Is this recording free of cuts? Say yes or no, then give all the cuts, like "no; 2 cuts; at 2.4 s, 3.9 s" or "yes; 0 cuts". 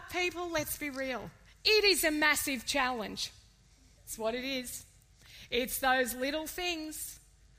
no; 1 cut; at 4.0 s